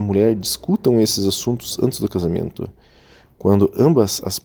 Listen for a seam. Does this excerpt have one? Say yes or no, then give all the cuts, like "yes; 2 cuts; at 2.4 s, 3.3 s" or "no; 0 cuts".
no; 0 cuts